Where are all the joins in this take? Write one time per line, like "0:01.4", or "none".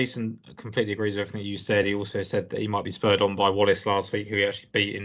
none